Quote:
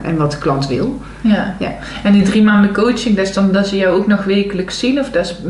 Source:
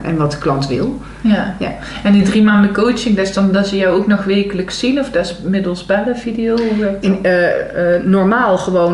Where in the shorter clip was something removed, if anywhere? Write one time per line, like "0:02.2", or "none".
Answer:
none